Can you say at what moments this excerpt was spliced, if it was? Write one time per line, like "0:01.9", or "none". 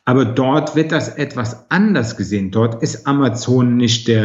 none